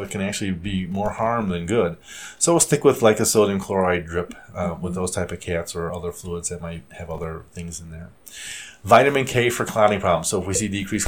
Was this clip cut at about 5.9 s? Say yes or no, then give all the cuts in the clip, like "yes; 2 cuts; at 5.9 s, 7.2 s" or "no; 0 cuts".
yes; 1 cut; at 5.9 s